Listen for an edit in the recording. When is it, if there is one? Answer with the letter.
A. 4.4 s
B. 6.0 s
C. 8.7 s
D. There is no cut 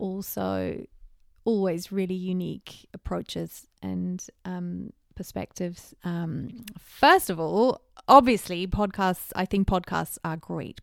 B